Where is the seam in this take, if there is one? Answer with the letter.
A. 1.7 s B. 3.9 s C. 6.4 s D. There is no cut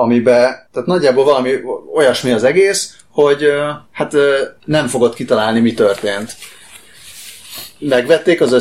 B